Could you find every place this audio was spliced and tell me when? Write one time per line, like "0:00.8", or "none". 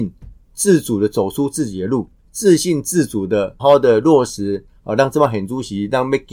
0:02.2
0:03.6